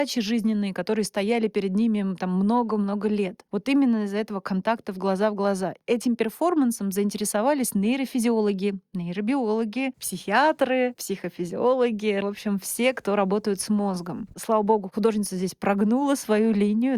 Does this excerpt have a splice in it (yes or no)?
yes